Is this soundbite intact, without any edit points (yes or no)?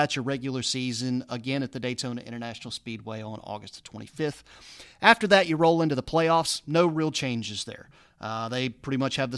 yes